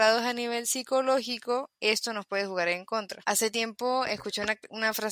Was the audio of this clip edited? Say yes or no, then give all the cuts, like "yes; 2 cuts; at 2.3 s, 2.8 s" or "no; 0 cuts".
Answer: no; 0 cuts